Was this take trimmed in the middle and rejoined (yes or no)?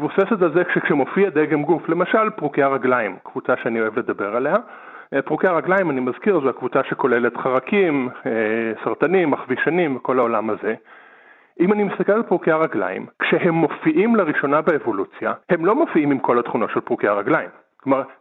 yes